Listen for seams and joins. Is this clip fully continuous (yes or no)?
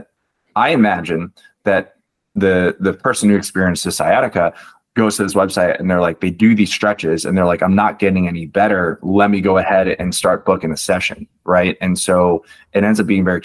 yes